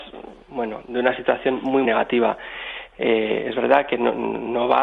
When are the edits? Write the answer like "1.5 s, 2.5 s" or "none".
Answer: 1.8 s